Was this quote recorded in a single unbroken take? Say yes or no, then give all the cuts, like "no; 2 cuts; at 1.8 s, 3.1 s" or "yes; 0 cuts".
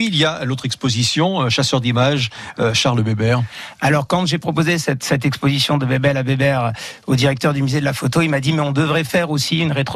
yes; 0 cuts